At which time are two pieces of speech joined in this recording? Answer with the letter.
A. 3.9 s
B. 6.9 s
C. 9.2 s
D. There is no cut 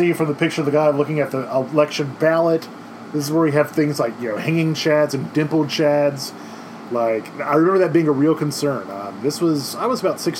B